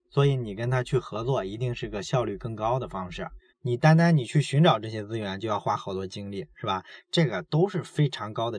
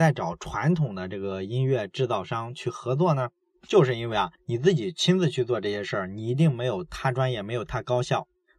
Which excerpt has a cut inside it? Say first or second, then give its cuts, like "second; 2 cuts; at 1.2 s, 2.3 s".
first; 2 cuts; at 3.5 s, 6.5 s